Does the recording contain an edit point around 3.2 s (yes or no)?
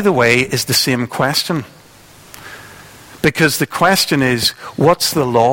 no